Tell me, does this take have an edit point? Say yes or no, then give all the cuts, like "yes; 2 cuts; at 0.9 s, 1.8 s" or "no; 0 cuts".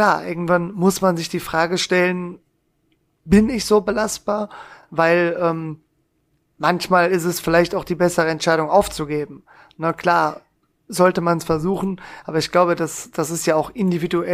no; 0 cuts